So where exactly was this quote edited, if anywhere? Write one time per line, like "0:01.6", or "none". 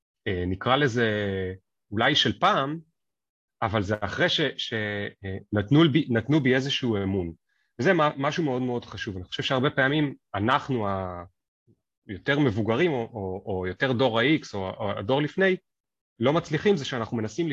none